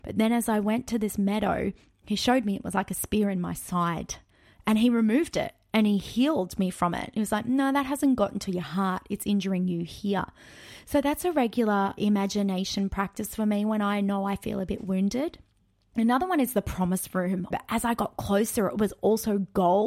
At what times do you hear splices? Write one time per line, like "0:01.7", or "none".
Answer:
0:17.5

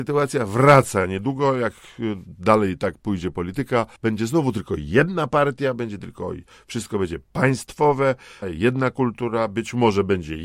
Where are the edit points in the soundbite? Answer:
0:04.0
0:08.4

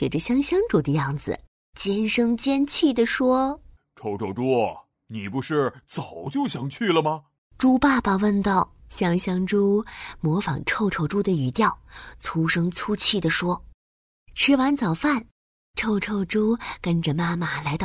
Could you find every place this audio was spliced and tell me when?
0:04.9
0:08.8

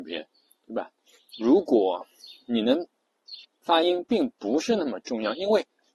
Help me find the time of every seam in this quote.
0:01.3
0:03.4

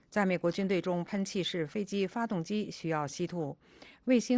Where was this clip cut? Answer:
none

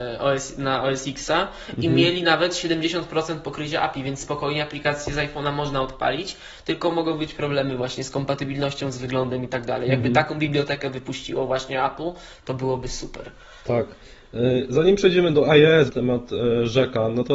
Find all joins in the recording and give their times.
0:15.9

